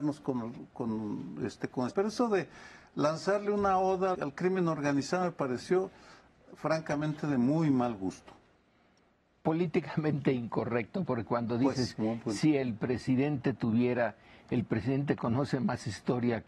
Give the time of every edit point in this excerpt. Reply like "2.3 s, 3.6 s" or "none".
1.9 s, 4.1 s